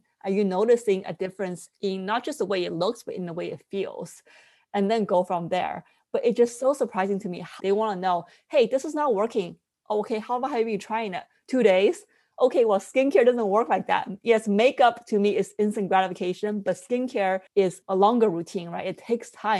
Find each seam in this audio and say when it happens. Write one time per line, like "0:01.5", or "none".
0:07.6
0:17.5